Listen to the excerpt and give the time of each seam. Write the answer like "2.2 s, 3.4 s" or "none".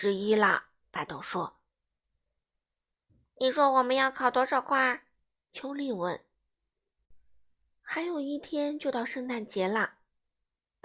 none